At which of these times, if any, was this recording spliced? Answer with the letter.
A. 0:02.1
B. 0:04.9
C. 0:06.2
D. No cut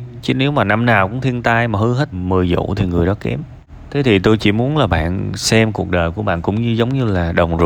A